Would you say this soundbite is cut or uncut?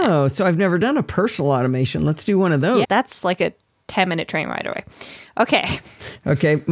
cut